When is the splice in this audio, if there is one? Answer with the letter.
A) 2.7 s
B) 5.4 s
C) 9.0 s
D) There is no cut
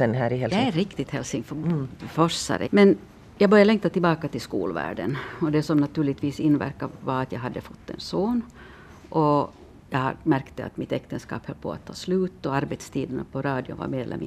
A